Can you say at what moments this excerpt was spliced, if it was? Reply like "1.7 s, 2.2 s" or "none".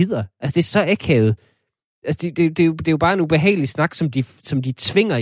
none